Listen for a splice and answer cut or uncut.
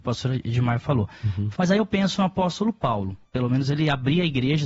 cut